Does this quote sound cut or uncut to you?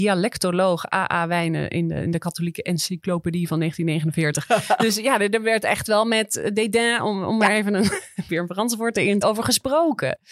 cut